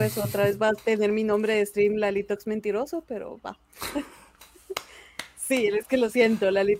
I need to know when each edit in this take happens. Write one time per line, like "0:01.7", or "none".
none